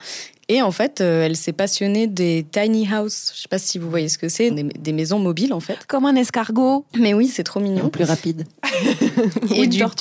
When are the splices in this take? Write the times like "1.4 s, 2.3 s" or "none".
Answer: 4.5 s